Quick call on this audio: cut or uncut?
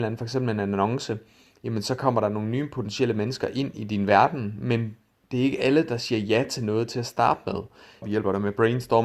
cut